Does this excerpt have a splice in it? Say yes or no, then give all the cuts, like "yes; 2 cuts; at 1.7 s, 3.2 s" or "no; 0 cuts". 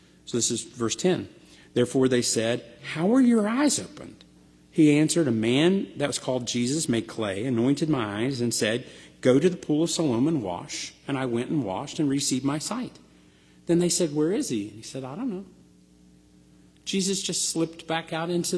no; 0 cuts